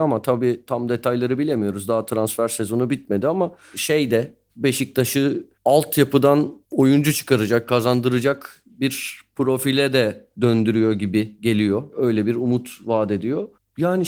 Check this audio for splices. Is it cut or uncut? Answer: cut